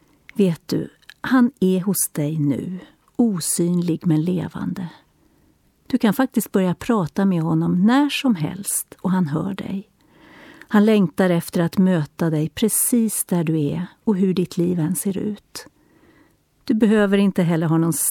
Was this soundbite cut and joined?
no; 0 cuts

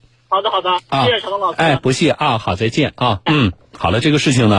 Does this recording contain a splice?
yes; 1 cut; at 3.3 s

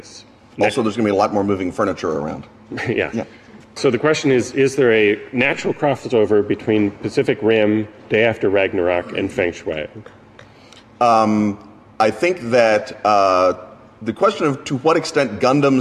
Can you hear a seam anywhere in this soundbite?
yes; 1 cut; at 3.6 s

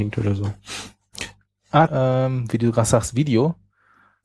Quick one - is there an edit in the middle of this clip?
yes; 1 cut; at 1.9 s

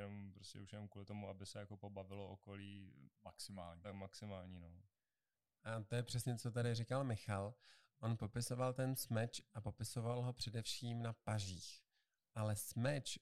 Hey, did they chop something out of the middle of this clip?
no; 0 cuts

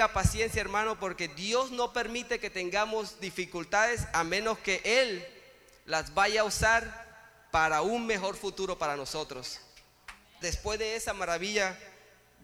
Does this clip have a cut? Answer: yes; 1 cut; at 10.4 s

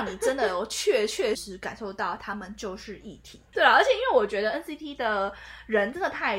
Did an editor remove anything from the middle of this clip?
yes; 2 cuts; at 1.3 s, 3.5 s

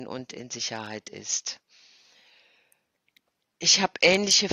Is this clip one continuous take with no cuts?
yes; 0 cuts

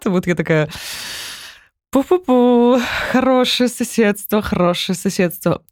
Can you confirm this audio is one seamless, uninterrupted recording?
yes; 0 cuts

